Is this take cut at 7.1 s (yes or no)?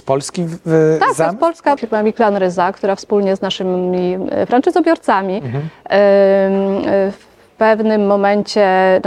no